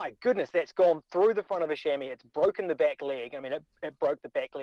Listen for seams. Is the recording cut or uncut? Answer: uncut